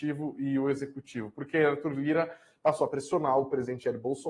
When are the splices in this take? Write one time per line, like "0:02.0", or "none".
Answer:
none